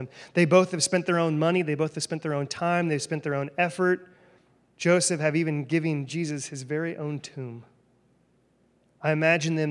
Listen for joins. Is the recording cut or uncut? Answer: uncut